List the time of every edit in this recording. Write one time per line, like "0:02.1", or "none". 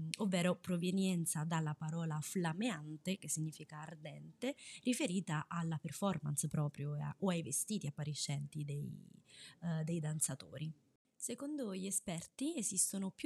none